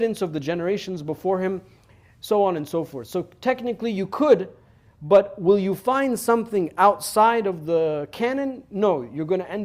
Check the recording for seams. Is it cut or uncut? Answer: uncut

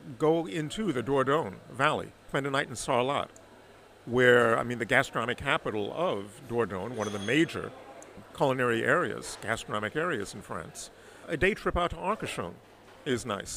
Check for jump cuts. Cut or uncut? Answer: uncut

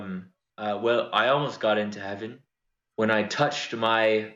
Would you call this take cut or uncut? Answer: cut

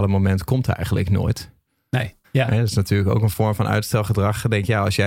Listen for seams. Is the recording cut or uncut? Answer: cut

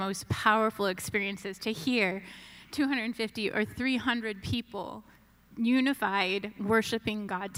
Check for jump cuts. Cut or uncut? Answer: uncut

